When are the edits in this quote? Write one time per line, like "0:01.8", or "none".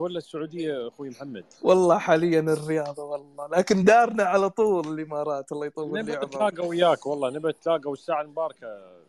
none